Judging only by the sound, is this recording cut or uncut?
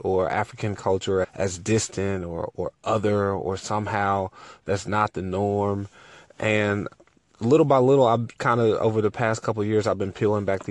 cut